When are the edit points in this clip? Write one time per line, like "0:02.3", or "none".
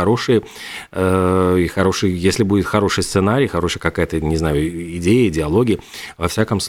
none